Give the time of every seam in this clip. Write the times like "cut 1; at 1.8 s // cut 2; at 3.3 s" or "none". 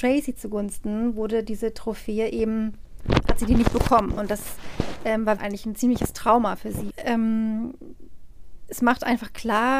cut 1; at 5.4 s // cut 2; at 6.9 s